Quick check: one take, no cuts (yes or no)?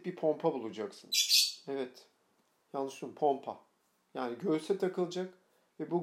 yes